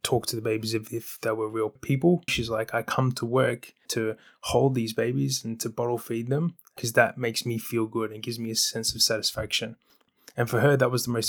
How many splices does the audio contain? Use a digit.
1